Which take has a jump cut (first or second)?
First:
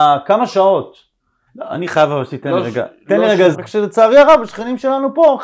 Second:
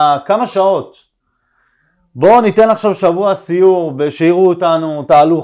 first